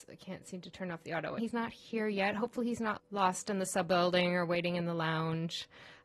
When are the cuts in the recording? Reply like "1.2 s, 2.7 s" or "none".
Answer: 1.4 s, 3.0 s

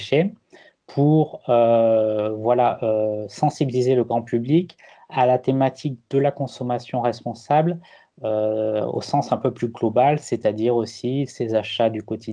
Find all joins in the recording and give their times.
none

